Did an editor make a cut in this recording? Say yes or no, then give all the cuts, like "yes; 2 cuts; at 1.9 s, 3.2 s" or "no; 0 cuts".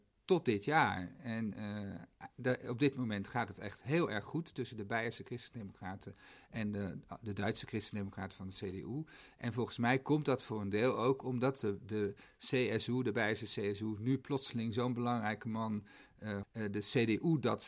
yes; 1 cut; at 16.4 s